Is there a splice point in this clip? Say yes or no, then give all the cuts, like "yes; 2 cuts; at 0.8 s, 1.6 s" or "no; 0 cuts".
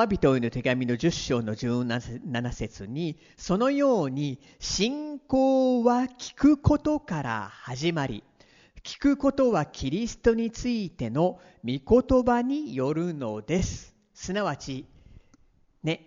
no; 0 cuts